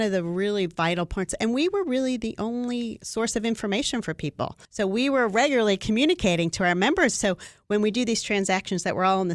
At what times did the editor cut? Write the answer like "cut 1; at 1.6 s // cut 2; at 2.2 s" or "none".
cut 1; at 4.6 s // cut 2; at 7.1 s